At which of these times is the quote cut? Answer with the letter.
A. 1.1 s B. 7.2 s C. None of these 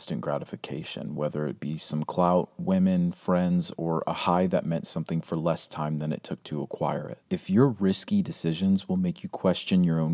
B